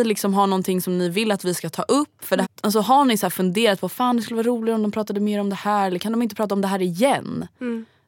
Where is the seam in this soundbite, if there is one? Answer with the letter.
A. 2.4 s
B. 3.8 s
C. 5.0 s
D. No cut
A